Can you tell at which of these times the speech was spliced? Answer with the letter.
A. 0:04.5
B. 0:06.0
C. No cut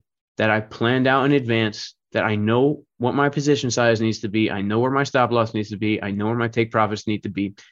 C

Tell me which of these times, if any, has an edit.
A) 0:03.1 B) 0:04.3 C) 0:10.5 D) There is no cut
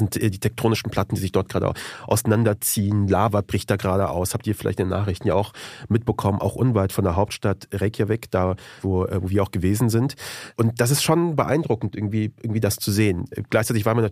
D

